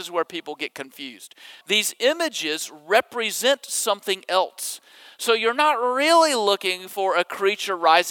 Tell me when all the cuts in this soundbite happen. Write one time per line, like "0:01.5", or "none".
0:01.6

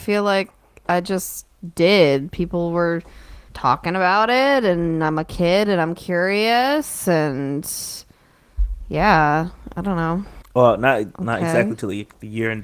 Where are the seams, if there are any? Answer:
0:03.5
0:10.4

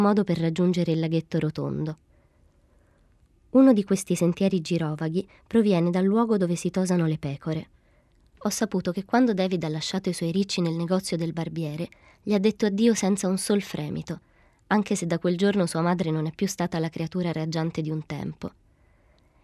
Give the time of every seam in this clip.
none

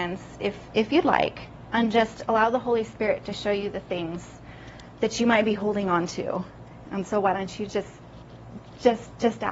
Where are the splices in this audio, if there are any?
0:06.8

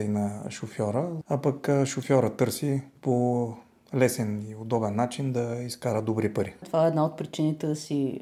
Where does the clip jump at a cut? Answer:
0:01.2
0:06.6

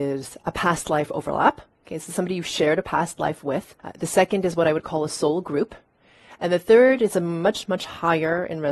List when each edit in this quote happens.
0:03.8
0:07.6

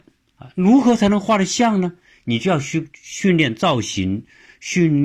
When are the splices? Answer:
none

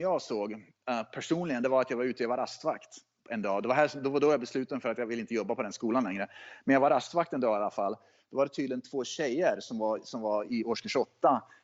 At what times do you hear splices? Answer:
0:10.5

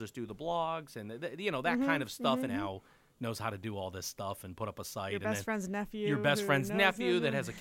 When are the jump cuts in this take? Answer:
0:02.5

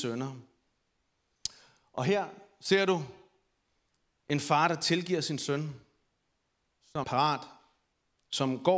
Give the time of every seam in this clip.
0:07.0

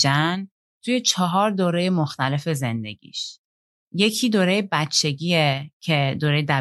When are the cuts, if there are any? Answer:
none

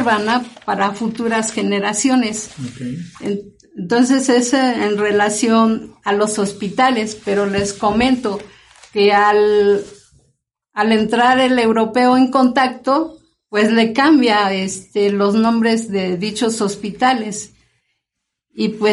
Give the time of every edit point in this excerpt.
none

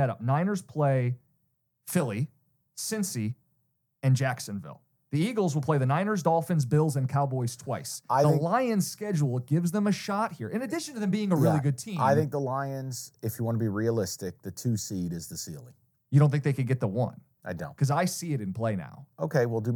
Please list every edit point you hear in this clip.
none

